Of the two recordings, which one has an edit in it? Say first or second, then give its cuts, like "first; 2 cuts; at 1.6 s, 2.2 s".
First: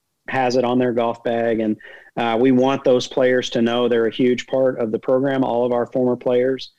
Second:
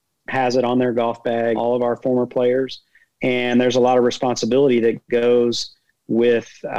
second; 1 cut; at 1.5 s